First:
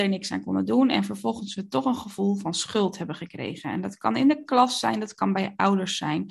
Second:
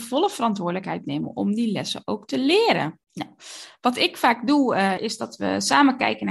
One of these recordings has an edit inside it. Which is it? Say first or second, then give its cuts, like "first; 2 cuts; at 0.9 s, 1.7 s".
second; 2 cuts; at 3.0 s, 5.0 s